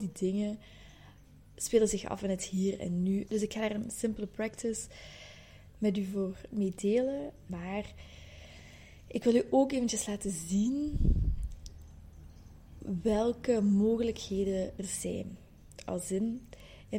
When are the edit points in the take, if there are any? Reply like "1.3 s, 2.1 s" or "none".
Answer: 3.3 s, 7.5 s, 14.8 s